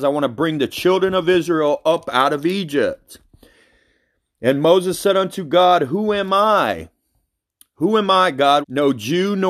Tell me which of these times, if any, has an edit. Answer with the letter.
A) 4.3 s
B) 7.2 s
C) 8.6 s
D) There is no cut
C